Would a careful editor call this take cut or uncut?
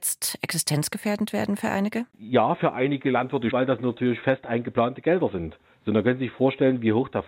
cut